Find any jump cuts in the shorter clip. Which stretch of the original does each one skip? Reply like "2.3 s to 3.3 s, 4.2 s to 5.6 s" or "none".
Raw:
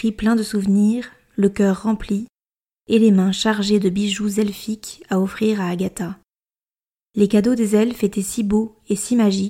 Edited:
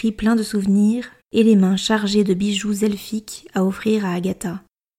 1.2 s to 2.8 s